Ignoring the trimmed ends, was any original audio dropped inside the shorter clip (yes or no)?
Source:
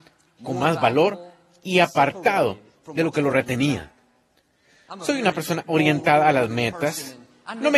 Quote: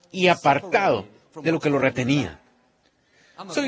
no